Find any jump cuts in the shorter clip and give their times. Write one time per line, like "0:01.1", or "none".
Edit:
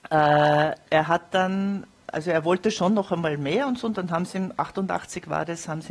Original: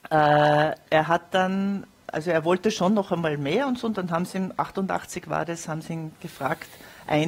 none